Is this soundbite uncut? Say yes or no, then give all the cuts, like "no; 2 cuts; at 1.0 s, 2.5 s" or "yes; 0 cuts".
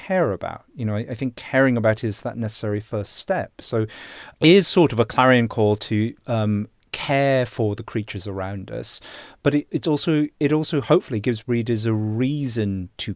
no; 2 cuts; at 4.4 s, 9.7 s